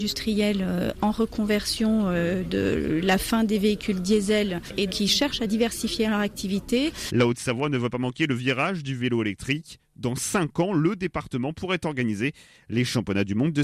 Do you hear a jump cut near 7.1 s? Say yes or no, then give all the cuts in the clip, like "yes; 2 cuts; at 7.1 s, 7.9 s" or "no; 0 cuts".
yes; 2 cuts; at 4.9 s, 7.1 s